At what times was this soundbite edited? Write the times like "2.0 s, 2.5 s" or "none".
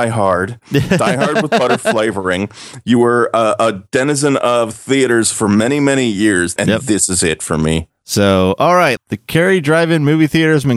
6.6 s, 7.9 s, 9.0 s